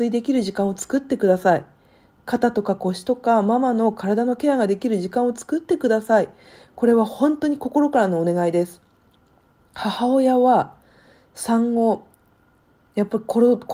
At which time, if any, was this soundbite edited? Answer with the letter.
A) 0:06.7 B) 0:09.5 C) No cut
C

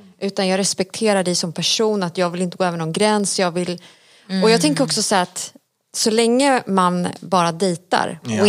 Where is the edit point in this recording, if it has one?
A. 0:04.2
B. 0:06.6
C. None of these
C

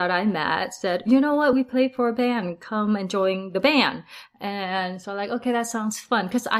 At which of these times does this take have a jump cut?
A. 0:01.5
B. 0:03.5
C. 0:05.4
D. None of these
D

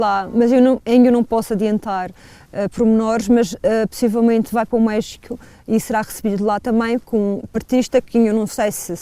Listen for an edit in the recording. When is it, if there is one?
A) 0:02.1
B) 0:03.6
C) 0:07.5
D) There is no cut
C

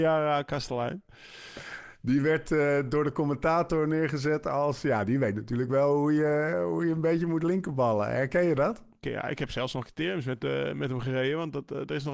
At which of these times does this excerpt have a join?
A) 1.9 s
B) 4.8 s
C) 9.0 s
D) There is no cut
C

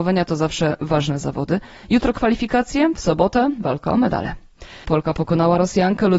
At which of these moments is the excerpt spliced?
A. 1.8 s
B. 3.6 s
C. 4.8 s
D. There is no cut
C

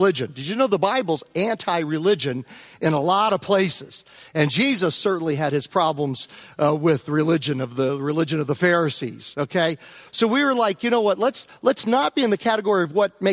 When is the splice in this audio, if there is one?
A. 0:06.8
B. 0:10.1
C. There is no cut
B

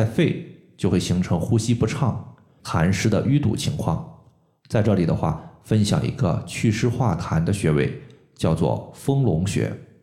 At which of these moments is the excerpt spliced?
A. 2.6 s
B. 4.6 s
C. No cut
A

